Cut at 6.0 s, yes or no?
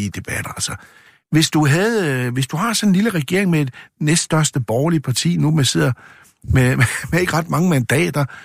no